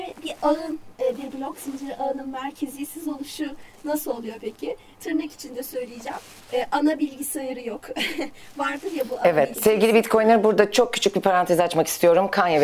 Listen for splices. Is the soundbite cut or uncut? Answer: cut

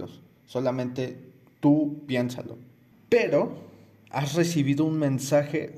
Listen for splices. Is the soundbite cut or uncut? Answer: cut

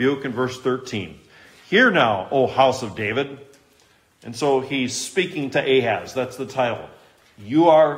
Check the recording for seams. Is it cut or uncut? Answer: uncut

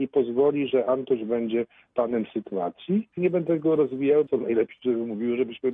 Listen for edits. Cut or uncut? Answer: cut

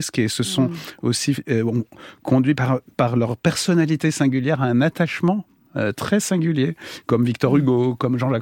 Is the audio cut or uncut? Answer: uncut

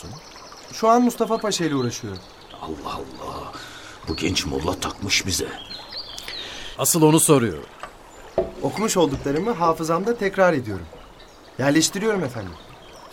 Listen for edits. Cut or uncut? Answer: cut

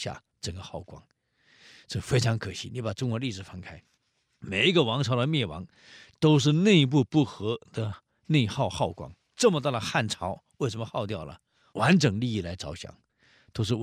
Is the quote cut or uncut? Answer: cut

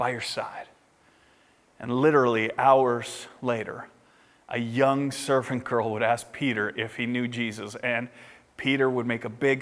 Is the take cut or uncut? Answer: uncut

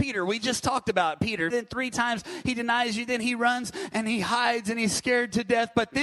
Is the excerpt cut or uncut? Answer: cut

